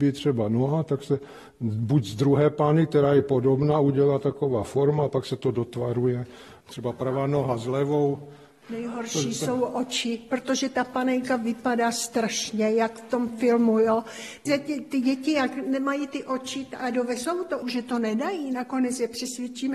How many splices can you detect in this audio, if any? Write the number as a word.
two